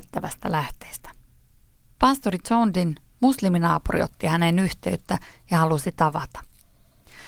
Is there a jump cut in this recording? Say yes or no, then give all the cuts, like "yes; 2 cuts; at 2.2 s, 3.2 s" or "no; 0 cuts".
no; 0 cuts